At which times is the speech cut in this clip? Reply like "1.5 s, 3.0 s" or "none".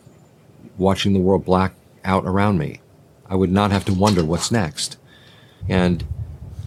5.6 s